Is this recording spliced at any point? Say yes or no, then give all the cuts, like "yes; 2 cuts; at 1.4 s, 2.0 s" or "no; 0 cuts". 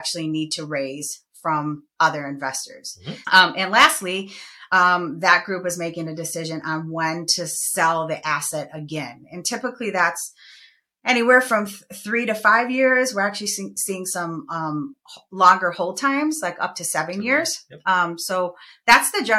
yes; 1 cut; at 3.2 s